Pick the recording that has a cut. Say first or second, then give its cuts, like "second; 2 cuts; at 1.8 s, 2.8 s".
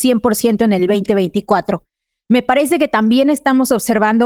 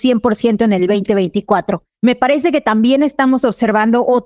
second; 1 cut; at 2.0 s